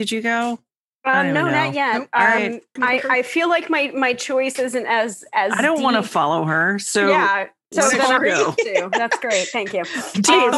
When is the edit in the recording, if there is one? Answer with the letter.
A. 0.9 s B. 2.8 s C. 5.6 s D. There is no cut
B